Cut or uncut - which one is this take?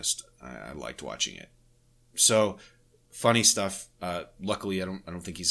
uncut